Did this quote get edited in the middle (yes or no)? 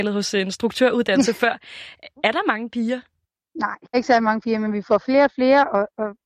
yes